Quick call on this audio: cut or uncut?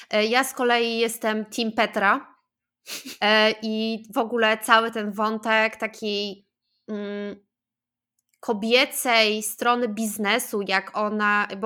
cut